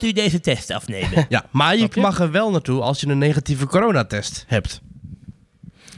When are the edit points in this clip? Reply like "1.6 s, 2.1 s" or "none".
1.3 s

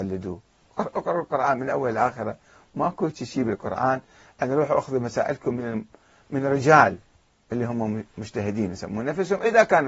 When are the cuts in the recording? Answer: none

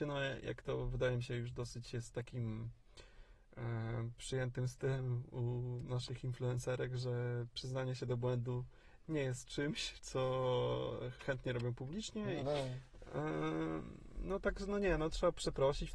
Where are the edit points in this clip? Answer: 12.4 s

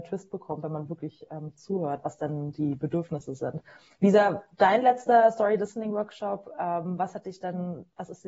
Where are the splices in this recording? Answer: none

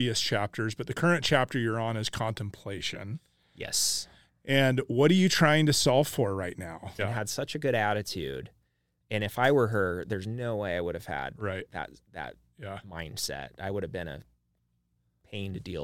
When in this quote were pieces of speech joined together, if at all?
7.0 s

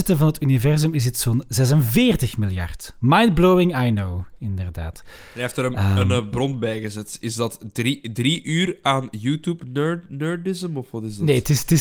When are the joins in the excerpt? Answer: none

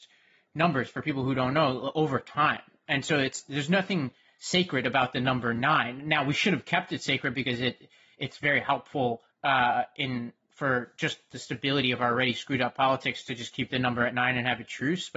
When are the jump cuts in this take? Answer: 9.3 s

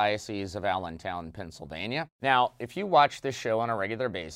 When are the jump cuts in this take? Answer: 2.1 s

